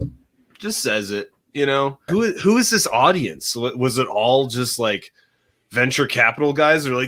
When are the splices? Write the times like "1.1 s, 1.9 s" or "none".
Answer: 2.1 s